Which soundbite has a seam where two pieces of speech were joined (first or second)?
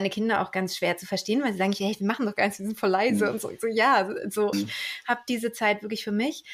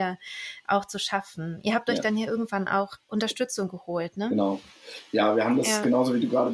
first